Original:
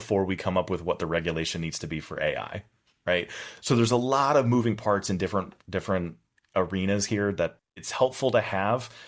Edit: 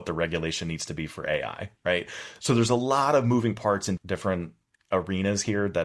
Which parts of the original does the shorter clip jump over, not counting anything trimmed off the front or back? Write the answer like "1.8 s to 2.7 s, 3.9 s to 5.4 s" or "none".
2.7 s to 3.0 s, 5.2 s to 5.6 s